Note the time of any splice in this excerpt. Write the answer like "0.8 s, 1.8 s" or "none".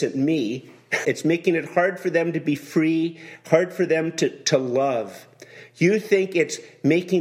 1.0 s

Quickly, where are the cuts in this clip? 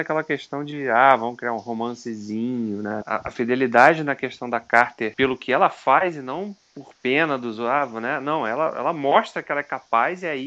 3.0 s, 5.1 s

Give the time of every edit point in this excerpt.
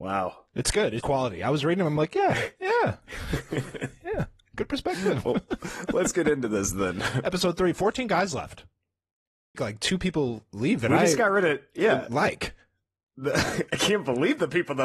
1.0 s, 9.5 s

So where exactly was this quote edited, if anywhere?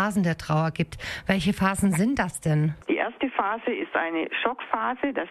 none

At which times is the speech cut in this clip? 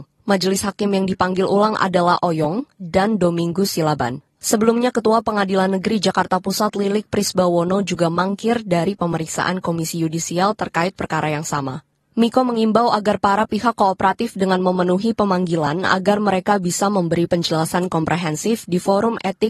2.8 s

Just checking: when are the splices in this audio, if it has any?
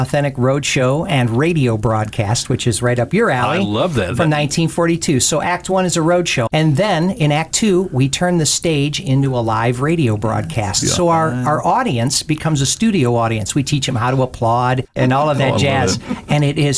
6.5 s

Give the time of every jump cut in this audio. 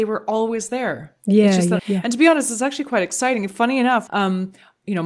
1.8 s, 4.1 s

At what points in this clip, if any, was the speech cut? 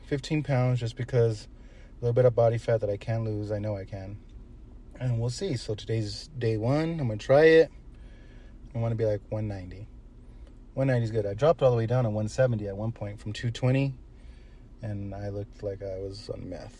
8.7 s

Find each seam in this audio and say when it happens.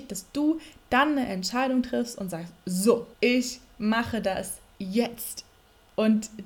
3.1 s

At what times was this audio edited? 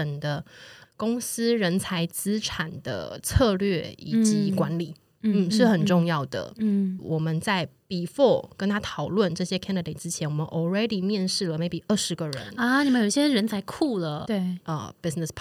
7.0 s, 14.2 s

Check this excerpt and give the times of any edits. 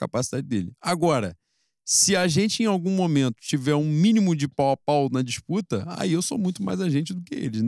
none

